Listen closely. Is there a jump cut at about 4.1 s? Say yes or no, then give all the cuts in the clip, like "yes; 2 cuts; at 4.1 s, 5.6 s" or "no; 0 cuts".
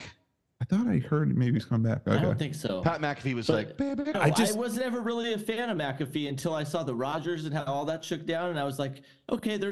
yes; 1 cut; at 4.1 s